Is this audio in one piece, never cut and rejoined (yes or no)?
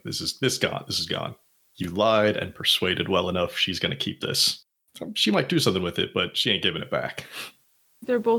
yes